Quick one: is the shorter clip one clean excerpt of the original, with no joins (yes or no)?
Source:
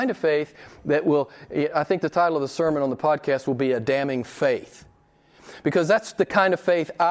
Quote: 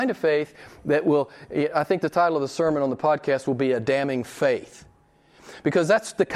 yes